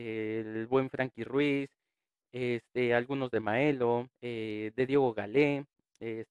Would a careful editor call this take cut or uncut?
cut